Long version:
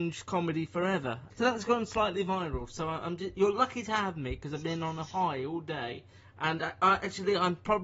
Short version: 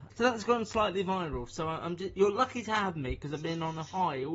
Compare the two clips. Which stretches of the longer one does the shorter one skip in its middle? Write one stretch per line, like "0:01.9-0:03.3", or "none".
none